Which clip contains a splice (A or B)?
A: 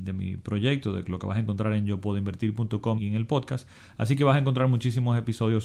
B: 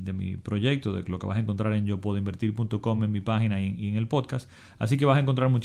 A